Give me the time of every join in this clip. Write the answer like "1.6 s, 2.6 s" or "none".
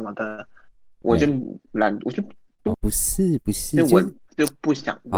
1.0 s, 2.7 s